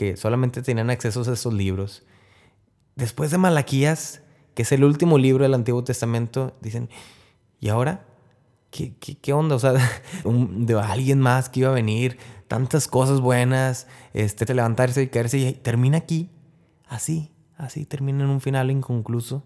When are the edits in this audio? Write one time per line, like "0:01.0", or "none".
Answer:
0:10.2
0:14.5